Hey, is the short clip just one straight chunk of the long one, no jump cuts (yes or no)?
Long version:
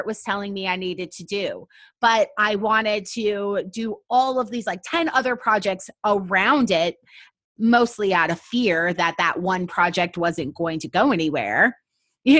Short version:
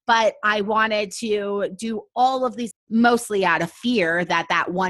no